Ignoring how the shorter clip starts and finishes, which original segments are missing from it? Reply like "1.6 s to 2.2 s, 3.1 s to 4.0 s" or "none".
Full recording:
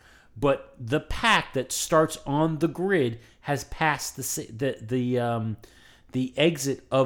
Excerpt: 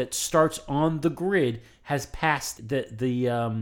4.1 s to 4.5 s